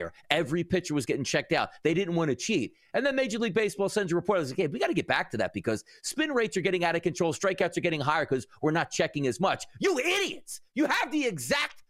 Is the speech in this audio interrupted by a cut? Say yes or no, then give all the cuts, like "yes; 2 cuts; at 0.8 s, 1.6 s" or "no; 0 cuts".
no; 0 cuts